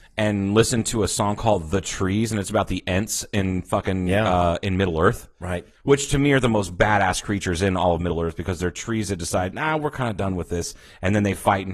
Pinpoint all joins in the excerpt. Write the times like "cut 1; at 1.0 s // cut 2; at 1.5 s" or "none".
none